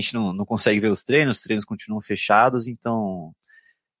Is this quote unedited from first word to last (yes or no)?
yes